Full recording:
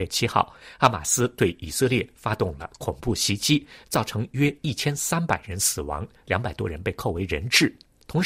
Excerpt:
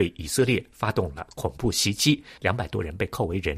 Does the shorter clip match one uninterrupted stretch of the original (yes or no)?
no